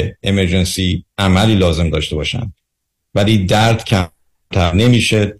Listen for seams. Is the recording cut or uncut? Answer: cut